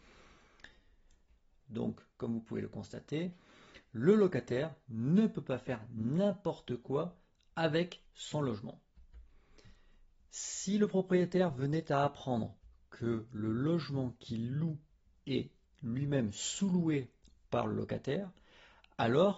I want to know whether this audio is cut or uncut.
cut